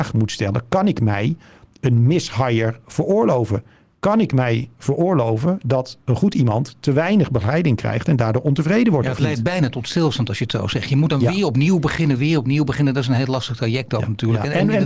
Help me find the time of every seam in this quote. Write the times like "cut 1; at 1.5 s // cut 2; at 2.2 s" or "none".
none